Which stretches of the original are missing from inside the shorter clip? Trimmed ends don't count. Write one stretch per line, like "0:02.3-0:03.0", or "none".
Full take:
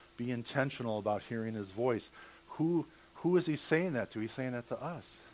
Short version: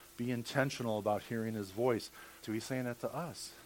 0:02.4-0:04.1